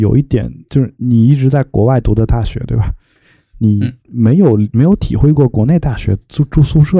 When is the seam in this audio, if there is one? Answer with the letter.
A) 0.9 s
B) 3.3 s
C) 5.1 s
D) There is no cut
A